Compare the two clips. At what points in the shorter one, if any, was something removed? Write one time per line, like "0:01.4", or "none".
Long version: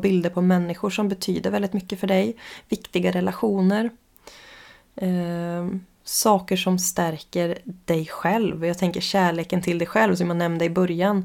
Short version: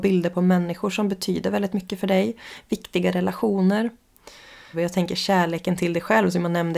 0:04.7

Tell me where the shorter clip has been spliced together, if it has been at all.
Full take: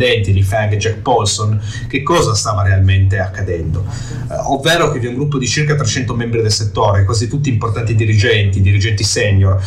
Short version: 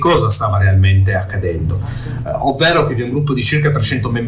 none

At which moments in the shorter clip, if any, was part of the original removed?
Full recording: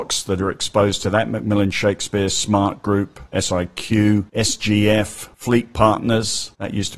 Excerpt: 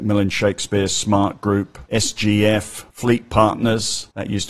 0:01.9

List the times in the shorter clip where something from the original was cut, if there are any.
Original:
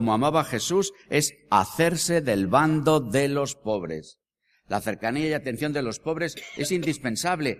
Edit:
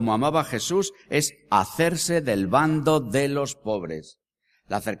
none

